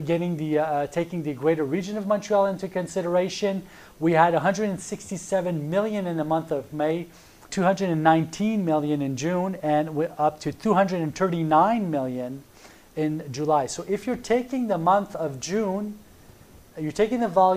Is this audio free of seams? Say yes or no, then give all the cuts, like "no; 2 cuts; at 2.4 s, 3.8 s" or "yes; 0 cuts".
no; 1 cut; at 7.5 s